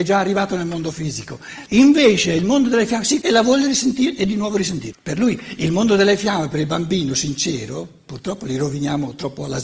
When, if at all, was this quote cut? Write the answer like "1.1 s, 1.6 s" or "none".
1.7 s, 3.2 s, 4.9 s